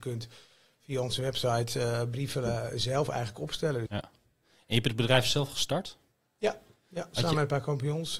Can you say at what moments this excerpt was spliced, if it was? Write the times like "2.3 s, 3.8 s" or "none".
3.9 s